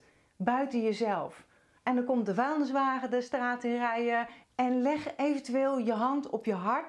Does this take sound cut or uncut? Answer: cut